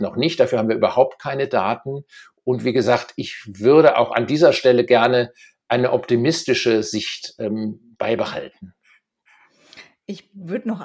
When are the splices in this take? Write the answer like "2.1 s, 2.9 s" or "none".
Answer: none